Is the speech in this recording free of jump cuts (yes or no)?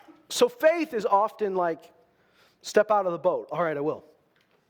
yes